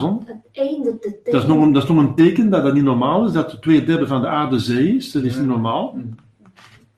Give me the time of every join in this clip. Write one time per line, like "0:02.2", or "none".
none